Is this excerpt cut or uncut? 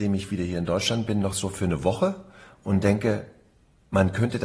uncut